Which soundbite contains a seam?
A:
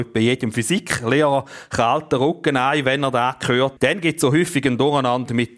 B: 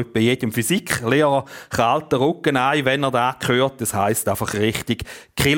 A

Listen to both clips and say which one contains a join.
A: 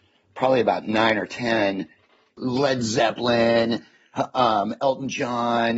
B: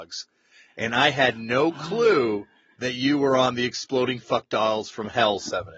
A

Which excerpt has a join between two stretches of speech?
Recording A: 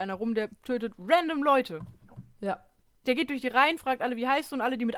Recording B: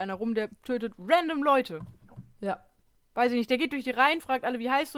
A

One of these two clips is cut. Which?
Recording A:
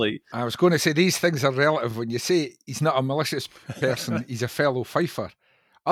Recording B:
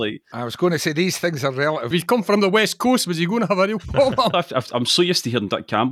B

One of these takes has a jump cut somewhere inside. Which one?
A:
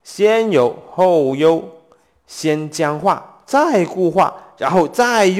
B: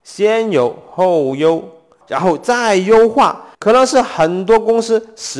B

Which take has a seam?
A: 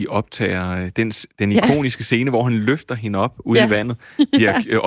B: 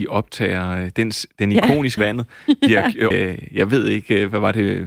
B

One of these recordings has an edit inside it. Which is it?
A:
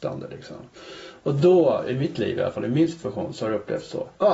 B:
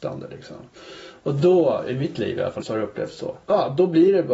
B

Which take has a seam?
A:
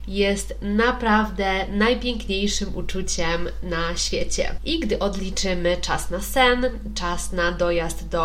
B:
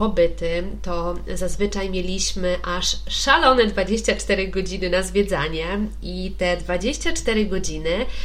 A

